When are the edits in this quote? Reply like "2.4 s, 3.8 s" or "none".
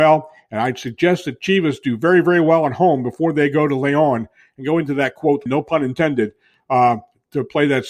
5.5 s